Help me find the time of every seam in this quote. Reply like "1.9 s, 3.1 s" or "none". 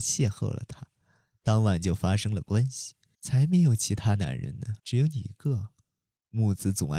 3.1 s, 4.8 s